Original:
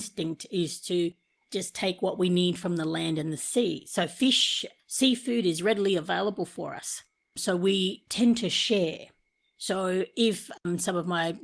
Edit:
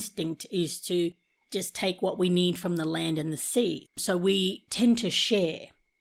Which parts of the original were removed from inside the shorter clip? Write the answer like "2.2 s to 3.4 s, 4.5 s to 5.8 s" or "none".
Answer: 3.8 s to 7.2 s

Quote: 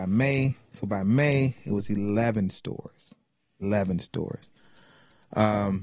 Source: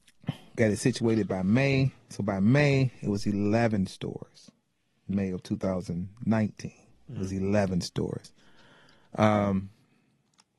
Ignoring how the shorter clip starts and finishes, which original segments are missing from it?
5.0 s to 7.4 s

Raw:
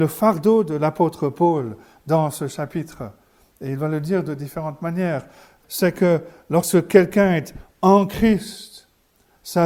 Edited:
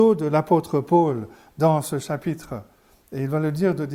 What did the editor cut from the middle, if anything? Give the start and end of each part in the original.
none

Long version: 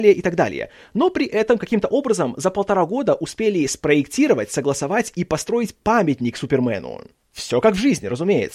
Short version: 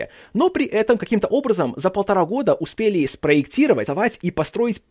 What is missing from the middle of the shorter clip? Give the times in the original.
4.5 s to 4.8 s

